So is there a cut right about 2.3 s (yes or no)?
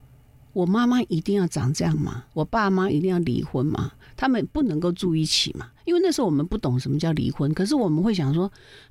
yes